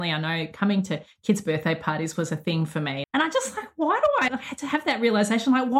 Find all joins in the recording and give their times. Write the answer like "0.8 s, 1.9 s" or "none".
3.0 s, 4.3 s